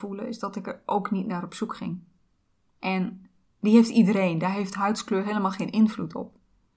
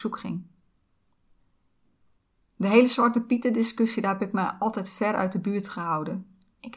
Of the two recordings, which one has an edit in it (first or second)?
first